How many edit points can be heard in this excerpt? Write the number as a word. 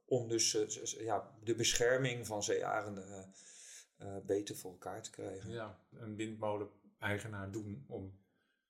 one